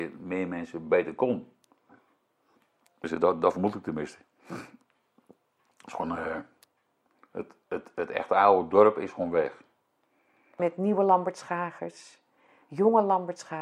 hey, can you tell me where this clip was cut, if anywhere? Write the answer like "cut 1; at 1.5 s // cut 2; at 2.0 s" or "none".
cut 1; at 10.6 s